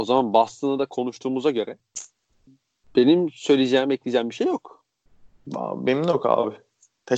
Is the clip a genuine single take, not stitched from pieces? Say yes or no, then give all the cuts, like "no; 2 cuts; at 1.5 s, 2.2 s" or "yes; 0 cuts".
yes; 0 cuts